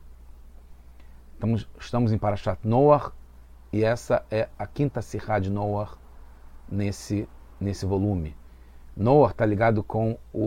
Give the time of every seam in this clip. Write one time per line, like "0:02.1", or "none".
none